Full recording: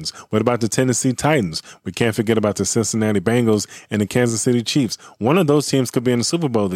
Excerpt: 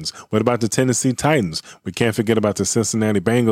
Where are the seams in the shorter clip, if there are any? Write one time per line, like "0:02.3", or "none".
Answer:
none